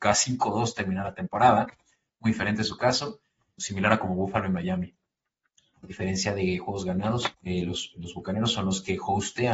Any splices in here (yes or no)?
yes